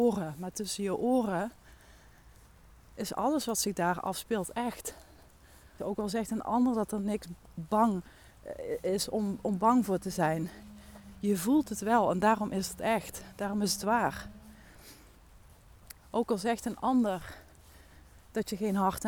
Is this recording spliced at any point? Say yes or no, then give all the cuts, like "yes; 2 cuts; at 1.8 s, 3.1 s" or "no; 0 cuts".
yes; 2 cuts; at 5.8 s, 16.0 s